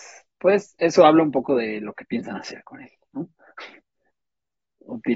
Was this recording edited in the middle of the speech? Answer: no; 0 cuts

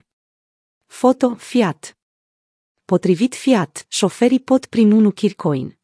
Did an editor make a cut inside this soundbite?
yes; 1 cut; at 3.9 s

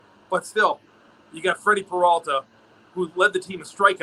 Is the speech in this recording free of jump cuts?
yes; 0 cuts

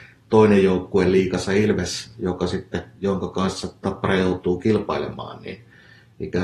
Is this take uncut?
yes; 0 cuts

